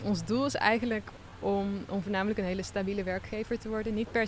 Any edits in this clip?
no; 0 cuts

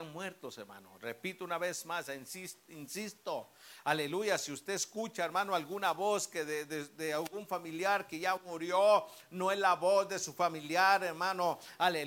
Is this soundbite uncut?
yes; 0 cuts

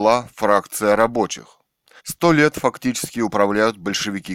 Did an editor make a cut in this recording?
yes; 1 cut; at 2.0 s

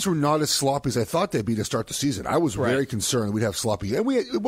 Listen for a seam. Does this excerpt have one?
no; 0 cuts

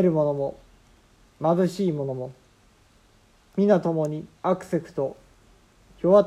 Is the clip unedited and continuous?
no; 1 cut; at 4.3 s

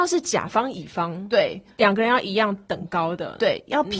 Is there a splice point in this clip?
no; 0 cuts

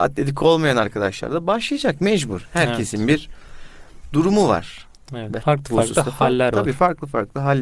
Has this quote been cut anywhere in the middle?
yes; 1 cut; at 5.4 s

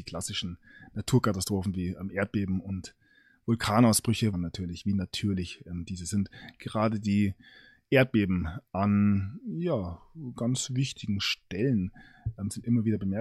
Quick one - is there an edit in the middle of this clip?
yes; 1 cut; at 4.3 s

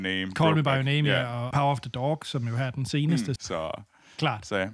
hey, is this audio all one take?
no; 2 cuts; at 1.5 s, 3.4 s

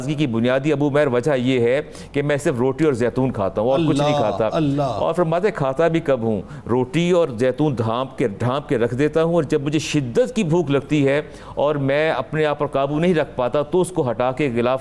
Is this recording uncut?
yes; 0 cuts

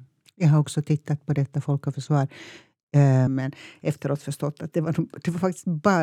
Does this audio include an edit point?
yes; 1 cut; at 3.3 s

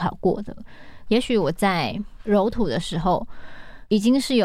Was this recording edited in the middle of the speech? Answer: yes; 1 cut; at 1.1 s

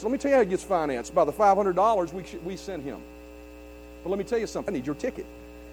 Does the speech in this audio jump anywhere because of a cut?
yes; 1 cut; at 4.7 s

